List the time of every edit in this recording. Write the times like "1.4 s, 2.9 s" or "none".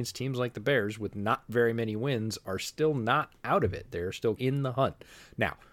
4.4 s